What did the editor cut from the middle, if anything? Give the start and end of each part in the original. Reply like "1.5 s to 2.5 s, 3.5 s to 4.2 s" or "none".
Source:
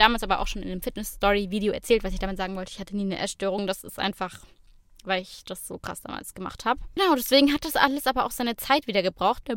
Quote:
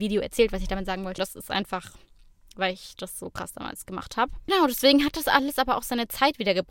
2.7 s to 3.7 s